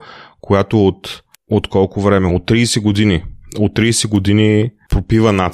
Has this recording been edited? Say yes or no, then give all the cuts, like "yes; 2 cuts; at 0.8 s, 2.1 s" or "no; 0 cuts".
no; 0 cuts